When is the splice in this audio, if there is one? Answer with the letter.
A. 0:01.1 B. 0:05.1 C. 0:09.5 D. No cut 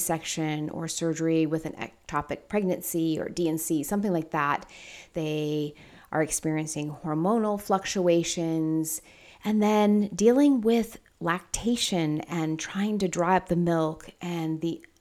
B